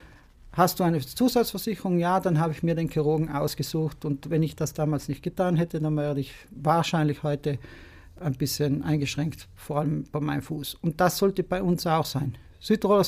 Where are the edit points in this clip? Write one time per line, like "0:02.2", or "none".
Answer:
none